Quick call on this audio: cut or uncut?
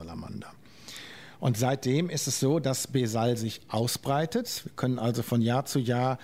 uncut